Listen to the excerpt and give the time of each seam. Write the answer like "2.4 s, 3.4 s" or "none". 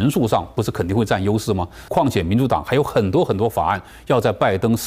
1.9 s